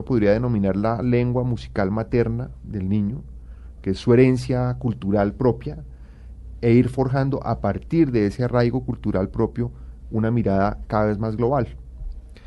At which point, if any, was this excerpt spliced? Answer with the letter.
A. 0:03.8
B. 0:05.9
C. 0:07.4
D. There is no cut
D